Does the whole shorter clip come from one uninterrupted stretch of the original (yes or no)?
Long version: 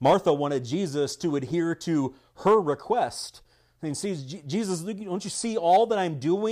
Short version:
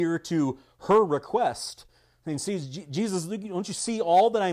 yes